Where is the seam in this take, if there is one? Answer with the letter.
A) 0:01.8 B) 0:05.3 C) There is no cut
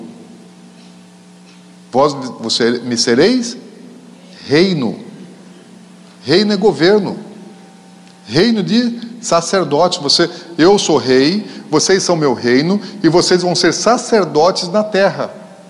C